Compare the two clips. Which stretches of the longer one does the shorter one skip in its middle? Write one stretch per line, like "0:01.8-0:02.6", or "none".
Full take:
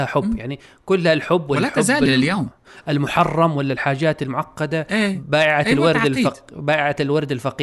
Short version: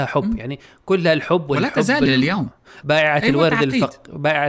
0:02.8-0:05.3